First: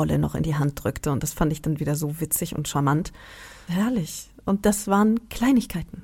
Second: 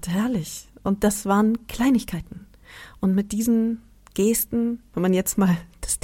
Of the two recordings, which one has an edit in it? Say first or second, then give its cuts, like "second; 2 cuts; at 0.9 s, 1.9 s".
first; 1 cut; at 3.7 s